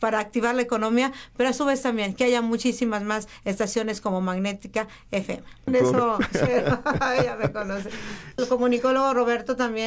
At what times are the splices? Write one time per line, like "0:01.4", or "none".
0:05.7
0:08.4